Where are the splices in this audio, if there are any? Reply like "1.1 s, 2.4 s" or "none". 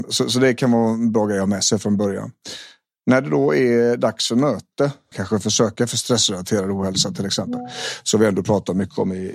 5.1 s